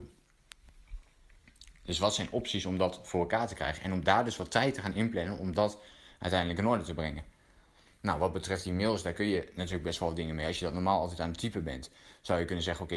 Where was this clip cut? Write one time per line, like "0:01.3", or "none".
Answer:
none